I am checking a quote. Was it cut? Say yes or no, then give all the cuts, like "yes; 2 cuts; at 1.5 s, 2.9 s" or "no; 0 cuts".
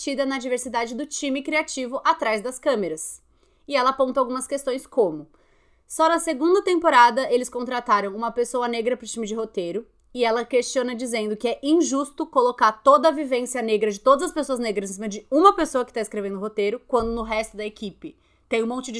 no; 0 cuts